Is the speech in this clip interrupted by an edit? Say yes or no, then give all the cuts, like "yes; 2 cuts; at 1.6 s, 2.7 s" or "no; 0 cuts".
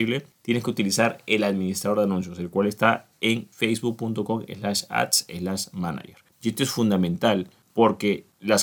yes; 1 cut; at 6.3 s